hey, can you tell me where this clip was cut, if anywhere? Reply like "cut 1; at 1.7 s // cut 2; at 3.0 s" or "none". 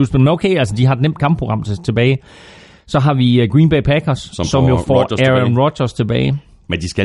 none